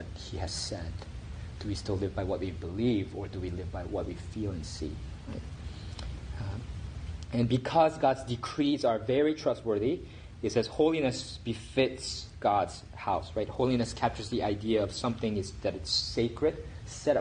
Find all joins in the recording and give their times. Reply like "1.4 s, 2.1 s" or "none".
none